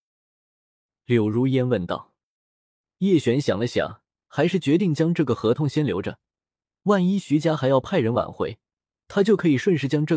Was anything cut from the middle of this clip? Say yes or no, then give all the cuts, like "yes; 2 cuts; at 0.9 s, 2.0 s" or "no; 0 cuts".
no; 0 cuts